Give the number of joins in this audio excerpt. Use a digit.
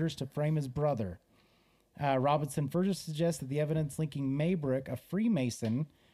0